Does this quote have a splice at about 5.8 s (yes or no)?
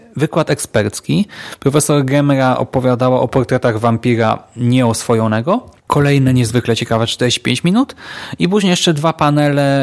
yes